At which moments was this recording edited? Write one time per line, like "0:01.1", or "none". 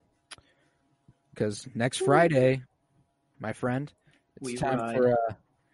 0:03.3